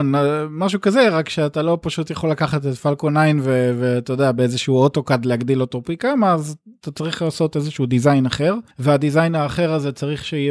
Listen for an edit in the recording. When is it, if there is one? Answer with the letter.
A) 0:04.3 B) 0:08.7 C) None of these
B